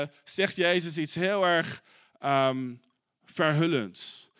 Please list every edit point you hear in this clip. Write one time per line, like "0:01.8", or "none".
none